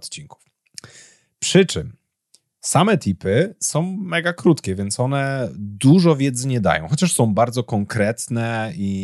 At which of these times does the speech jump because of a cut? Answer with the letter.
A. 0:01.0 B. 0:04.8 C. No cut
C